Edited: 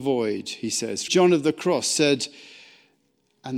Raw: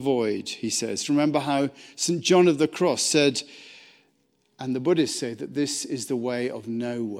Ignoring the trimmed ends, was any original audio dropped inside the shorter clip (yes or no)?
yes